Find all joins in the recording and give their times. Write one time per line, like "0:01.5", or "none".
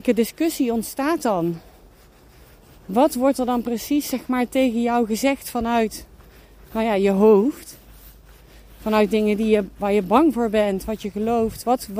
none